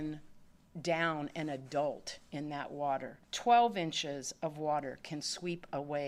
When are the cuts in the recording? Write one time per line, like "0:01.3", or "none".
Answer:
0:03.2

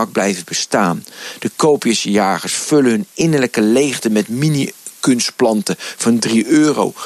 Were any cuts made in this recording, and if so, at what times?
none

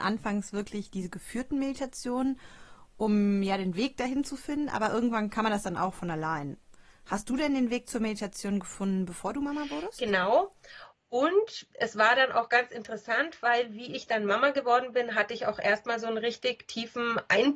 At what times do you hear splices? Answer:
none

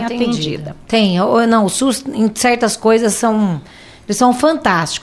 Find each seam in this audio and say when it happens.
none

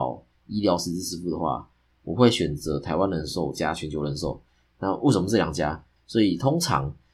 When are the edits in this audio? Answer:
0:06.0

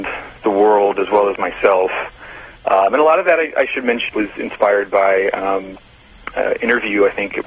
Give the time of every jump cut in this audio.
0:04.1

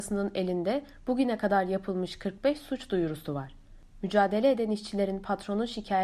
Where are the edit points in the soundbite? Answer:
none

